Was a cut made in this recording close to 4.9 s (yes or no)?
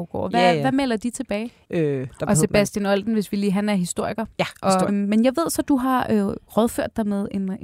yes